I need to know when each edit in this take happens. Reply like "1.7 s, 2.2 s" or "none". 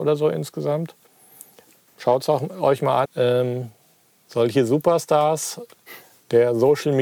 3.0 s